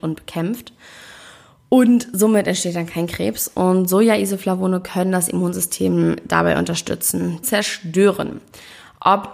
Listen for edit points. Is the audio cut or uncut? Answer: cut